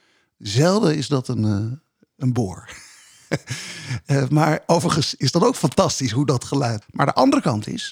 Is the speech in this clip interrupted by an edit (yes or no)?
yes